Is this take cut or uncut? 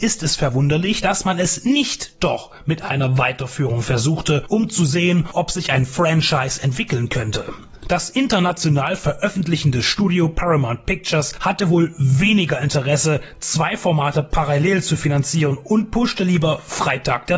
uncut